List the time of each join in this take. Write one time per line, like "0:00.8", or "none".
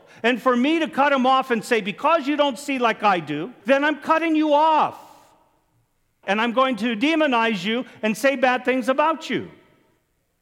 0:03.6
0:06.2